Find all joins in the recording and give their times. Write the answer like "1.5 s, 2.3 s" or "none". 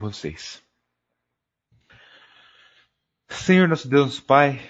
none